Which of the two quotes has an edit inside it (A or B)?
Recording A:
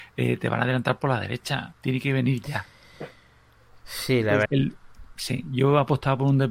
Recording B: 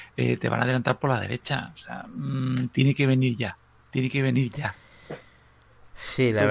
A